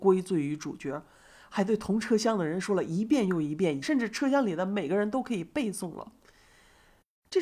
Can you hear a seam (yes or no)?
yes